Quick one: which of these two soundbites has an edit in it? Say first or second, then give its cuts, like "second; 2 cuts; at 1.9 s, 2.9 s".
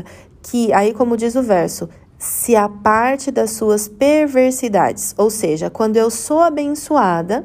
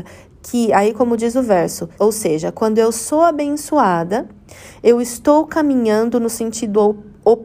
second; 1 cut; at 2.0 s